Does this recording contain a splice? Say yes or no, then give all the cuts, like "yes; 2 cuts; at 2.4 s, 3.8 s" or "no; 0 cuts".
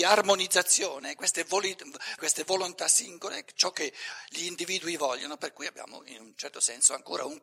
yes; 1 cut; at 2.2 s